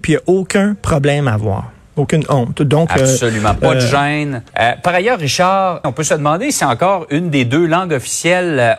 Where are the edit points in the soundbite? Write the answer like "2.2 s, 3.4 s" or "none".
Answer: 4.5 s, 5.8 s